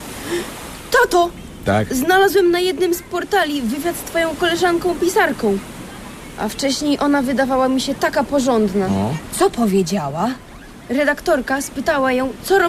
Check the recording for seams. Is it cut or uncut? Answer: uncut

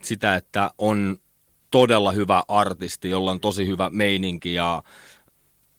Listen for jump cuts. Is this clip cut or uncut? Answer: uncut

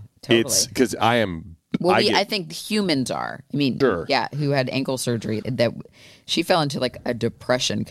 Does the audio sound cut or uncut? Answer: cut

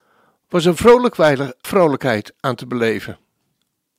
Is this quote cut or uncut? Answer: cut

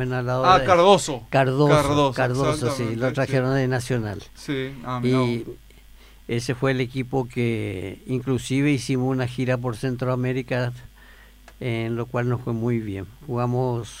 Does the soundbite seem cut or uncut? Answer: uncut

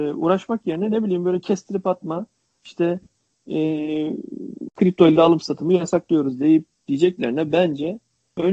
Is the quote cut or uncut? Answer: uncut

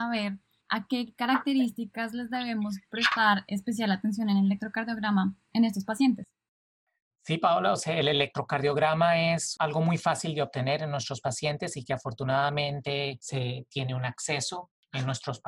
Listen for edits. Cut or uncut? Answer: uncut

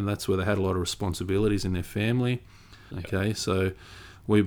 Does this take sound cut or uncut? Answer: cut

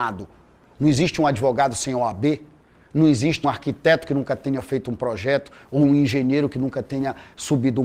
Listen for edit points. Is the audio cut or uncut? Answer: cut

